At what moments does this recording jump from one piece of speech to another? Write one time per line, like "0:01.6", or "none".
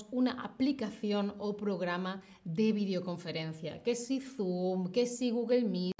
none